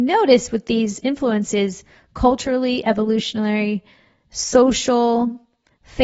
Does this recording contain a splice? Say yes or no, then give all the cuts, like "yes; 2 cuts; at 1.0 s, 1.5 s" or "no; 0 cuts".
no; 0 cuts